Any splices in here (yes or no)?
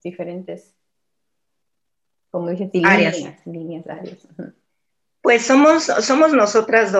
no